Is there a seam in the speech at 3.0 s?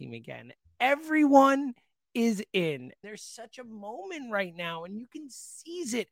yes; 1 cut; at 3.0 s

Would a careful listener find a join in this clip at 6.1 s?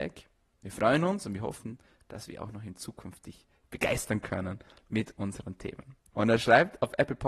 yes; 1 cut; at 6.1 s

